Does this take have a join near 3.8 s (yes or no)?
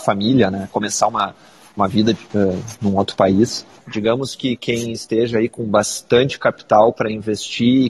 yes